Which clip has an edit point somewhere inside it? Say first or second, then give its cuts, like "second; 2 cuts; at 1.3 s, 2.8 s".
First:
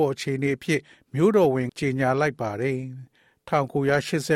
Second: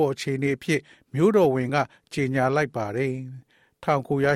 first; 1 cut; at 1.7 s